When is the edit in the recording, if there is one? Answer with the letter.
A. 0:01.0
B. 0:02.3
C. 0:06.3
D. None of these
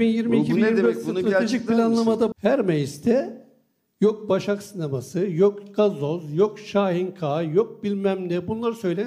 B